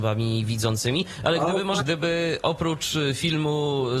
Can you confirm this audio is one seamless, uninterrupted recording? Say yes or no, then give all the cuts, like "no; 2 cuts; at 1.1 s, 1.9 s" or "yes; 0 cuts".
no; 1 cut; at 1.8 s